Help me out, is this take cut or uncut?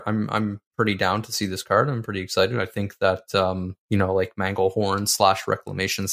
cut